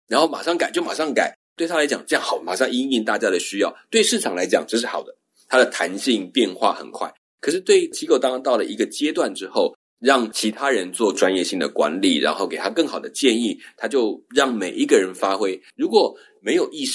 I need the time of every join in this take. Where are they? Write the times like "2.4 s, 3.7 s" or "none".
9.9 s, 15.7 s

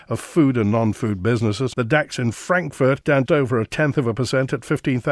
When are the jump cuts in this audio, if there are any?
1.7 s, 3.3 s

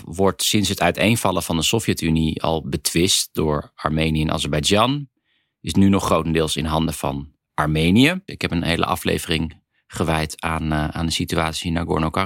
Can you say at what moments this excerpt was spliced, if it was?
8.3 s

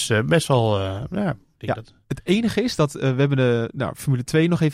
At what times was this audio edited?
none

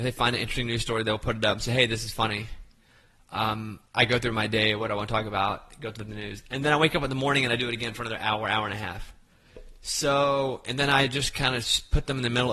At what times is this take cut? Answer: none

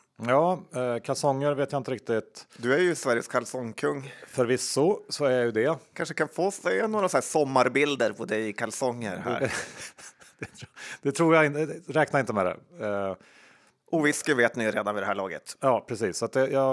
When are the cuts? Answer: none

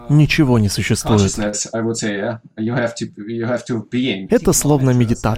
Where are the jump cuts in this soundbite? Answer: 4.3 s

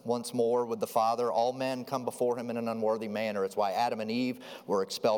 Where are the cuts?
none

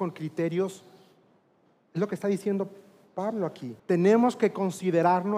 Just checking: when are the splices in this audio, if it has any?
3.8 s

